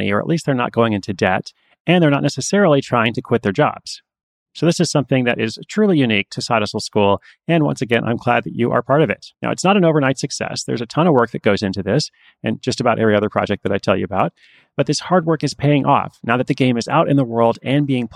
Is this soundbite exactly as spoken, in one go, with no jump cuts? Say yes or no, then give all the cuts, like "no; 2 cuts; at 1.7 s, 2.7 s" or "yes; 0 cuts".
no; 1 cut; at 9.3 s